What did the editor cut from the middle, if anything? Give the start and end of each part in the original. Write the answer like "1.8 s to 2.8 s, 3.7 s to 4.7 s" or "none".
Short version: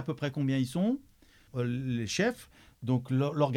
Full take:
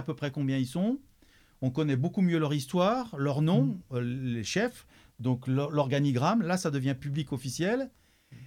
1.5 s to 3.8 s